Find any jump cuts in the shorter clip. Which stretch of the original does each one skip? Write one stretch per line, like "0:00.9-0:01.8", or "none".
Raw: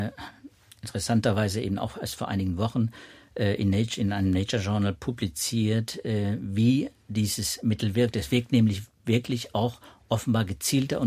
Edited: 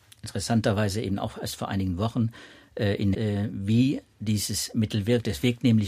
0:03.7-0:06.0